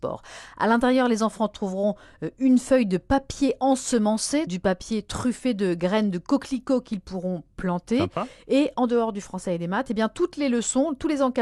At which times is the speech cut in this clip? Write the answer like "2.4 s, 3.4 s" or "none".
4.5 s

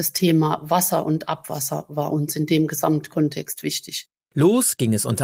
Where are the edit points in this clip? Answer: 4.3 s

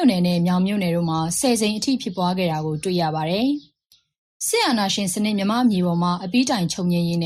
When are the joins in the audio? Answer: none

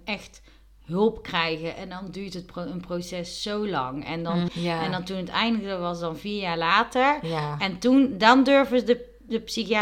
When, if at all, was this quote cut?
4.5 s

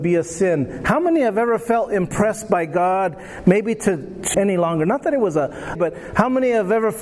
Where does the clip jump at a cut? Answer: 4.3 s, 5.8 s

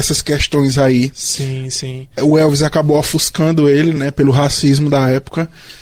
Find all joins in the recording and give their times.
none

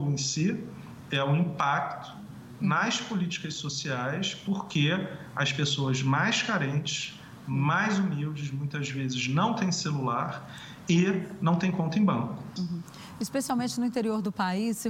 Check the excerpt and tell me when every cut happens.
12.6 s

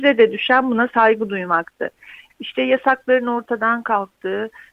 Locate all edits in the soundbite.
2.3 s

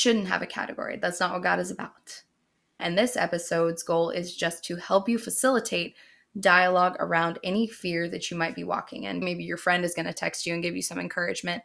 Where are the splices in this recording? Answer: 2.8 s, 9.2 s

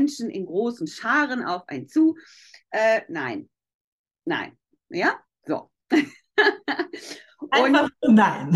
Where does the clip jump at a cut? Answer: none

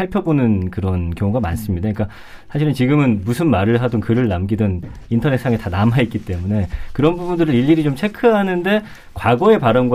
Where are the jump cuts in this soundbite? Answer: none

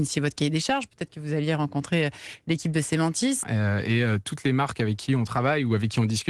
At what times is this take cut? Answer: 3.4 s

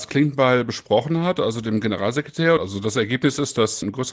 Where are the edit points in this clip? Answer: 2.6 s

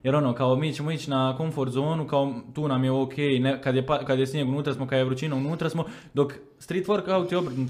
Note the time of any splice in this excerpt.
4.1 s

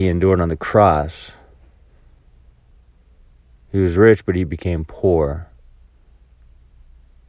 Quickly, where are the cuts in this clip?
none

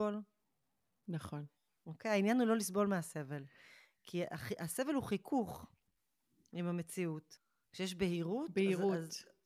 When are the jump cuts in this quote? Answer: none

